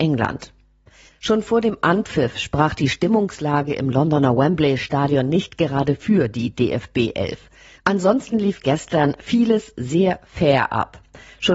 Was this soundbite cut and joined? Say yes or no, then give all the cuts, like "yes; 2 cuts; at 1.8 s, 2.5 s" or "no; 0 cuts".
yes; 2 cuts; at 1.1 s, 7.8 s